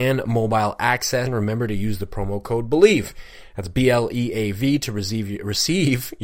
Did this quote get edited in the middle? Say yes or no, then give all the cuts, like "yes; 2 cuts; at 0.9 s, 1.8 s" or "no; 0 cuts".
yes; 1 cut; at 1.3 s